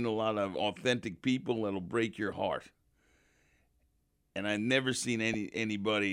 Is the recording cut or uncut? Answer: uncut